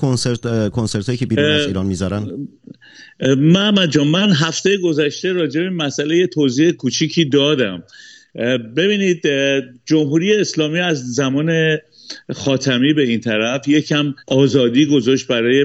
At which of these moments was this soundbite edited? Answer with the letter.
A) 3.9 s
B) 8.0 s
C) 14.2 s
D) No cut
C